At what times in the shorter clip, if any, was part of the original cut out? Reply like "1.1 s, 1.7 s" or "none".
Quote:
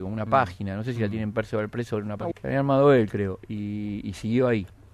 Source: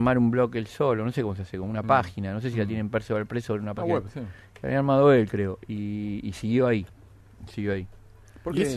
2.3 s